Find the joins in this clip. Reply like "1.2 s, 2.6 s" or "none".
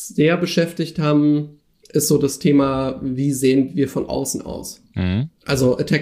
none